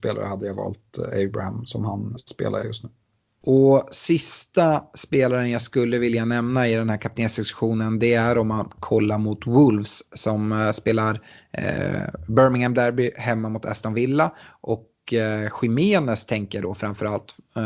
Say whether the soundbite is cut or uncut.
cut